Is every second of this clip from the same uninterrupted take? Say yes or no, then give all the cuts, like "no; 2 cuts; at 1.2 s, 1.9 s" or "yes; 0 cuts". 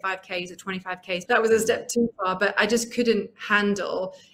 no; 1 cut; at 1.3 s